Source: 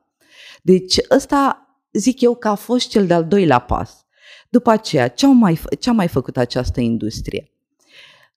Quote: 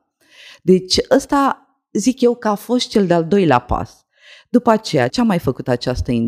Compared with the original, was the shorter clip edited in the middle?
yes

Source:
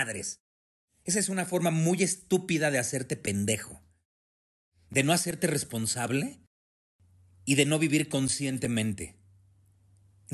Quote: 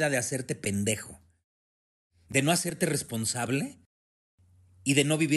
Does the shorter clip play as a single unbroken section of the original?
yes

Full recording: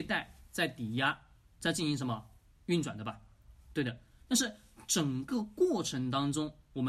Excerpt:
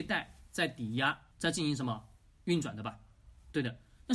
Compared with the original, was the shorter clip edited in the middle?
yes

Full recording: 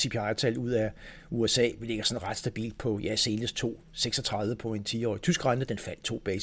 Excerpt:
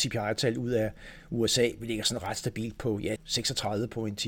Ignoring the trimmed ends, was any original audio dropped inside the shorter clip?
yes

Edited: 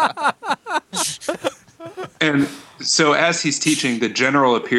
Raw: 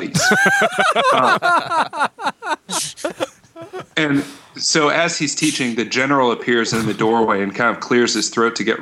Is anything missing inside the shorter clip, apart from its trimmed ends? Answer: no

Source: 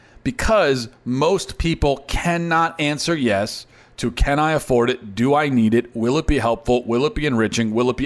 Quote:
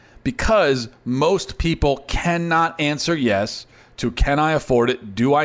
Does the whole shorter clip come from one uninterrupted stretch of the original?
yes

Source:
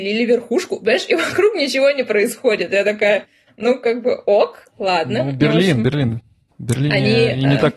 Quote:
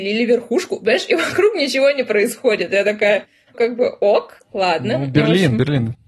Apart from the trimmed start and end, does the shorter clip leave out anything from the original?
yes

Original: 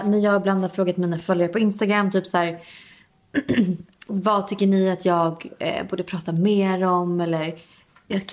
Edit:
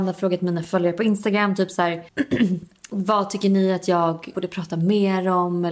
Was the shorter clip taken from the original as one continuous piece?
no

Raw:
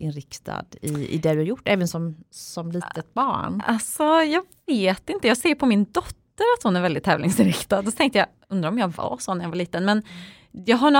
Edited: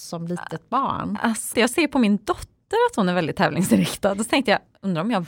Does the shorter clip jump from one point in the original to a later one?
yes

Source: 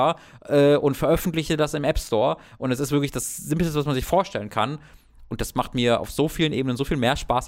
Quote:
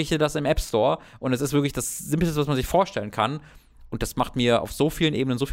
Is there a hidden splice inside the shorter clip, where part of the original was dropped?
no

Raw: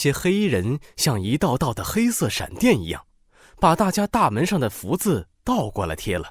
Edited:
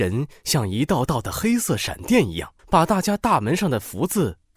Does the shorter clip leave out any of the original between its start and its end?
yes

